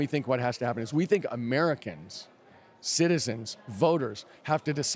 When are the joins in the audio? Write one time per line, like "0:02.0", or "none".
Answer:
none

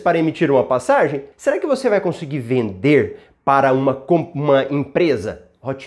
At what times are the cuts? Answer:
0:01.3

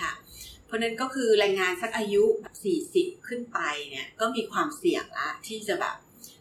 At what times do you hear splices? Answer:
0:02.4

